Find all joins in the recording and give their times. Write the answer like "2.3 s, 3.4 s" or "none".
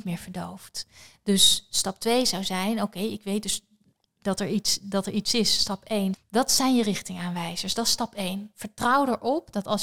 6.1 s